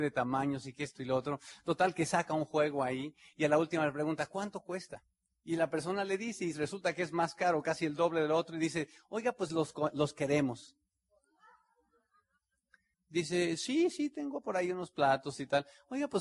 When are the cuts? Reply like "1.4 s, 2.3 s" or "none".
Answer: 12.9 s

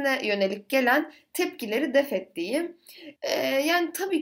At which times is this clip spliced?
3.2 s

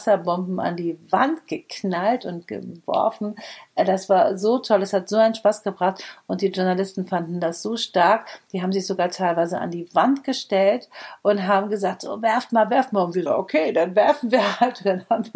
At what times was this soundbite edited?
13.3 s

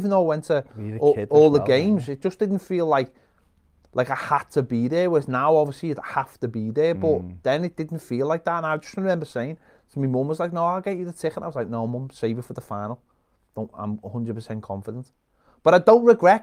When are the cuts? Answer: none

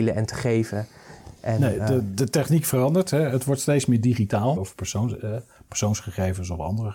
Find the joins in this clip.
4.6 s

